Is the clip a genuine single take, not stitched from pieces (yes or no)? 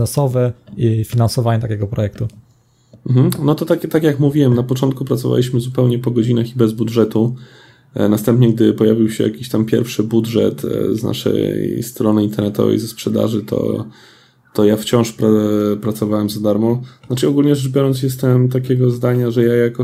yes